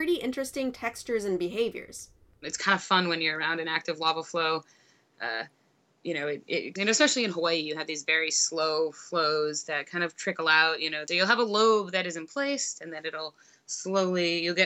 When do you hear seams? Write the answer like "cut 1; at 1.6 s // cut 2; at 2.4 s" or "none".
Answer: cut 1; at 6.8 s